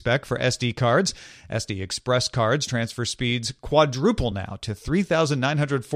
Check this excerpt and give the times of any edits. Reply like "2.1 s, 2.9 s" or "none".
none

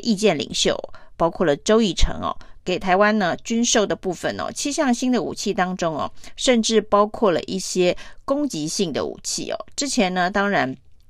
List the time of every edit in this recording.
1.1 s, 2.6 s

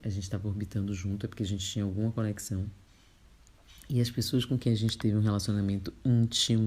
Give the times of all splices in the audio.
none

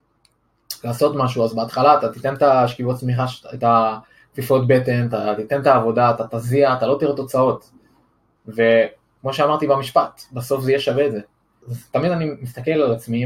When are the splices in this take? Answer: 8.4 s, 11.6 s

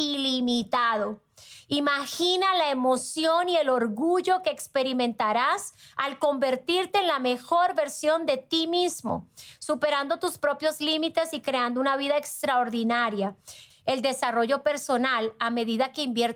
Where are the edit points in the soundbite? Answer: 13.7 s

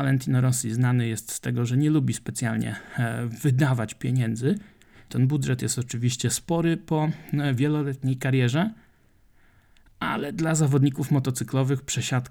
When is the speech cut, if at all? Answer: 5.1 s

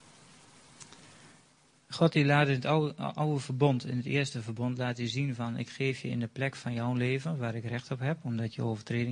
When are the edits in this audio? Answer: none

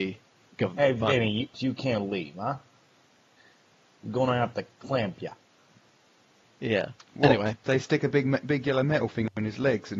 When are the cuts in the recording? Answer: 1.5 s

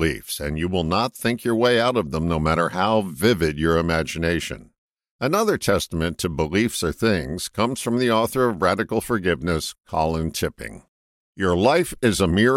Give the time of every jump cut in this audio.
none

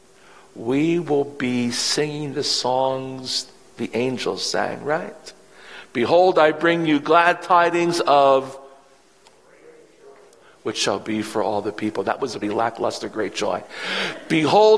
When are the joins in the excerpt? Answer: 12.4 s

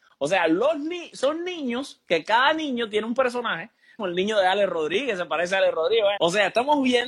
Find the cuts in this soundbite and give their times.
4.0 s, 6.2 s

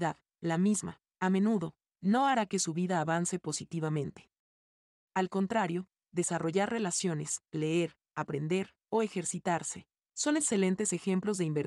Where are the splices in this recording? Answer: none

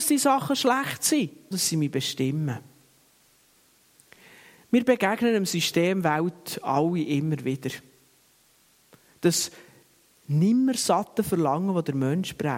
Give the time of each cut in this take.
1.5 s

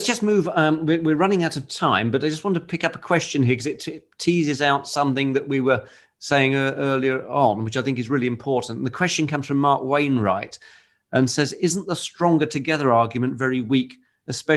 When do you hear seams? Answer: none

